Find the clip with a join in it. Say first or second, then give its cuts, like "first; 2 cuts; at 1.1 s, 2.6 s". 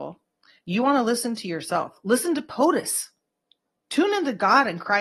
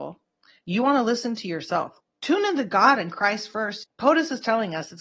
second; 2 cuts; at 2.0 s, 3.8 s